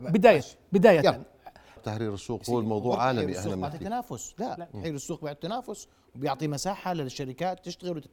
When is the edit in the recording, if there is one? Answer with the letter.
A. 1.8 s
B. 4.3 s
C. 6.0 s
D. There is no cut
A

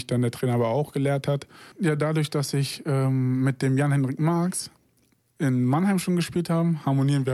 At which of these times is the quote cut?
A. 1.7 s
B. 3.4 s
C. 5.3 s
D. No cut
A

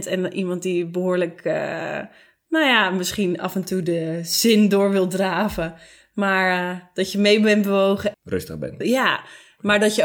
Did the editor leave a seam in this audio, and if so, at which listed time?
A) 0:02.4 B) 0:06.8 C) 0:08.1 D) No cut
C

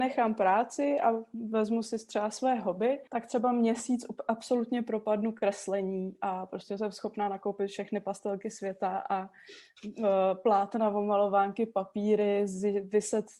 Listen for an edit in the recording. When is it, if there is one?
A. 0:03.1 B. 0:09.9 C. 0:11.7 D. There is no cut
A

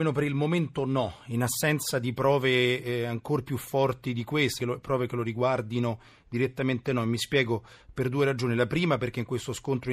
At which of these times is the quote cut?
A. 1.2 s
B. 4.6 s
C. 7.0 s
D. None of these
B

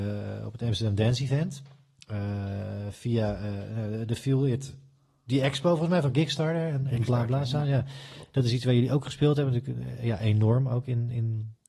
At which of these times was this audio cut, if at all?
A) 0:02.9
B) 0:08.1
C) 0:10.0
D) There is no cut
D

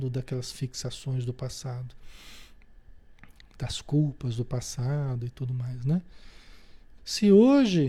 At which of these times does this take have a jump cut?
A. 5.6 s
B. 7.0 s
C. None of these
B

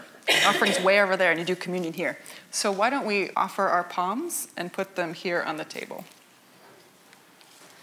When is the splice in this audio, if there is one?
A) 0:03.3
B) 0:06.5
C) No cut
A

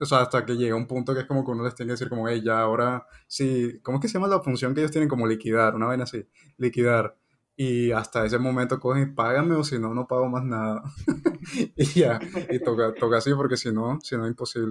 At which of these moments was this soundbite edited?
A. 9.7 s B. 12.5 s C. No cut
C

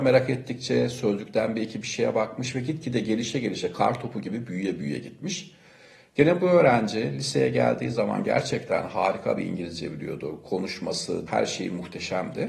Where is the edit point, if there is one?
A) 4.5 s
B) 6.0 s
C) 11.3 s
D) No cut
C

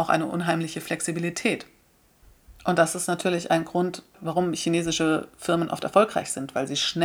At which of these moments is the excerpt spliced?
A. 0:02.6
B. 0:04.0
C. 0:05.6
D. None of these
D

